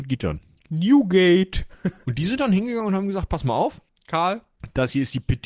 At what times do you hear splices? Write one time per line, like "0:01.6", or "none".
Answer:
0:02.0